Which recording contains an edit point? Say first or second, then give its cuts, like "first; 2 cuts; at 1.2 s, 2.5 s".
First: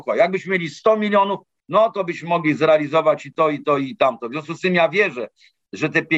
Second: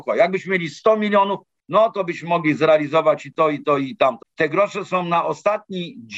second; 1 cut; at 4.2 s